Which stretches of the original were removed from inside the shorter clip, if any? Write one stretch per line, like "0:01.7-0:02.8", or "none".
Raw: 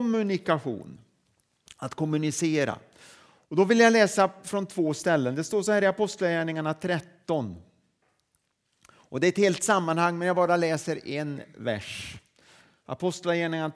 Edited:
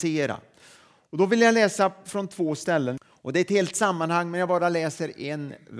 0:05.4-0:08.8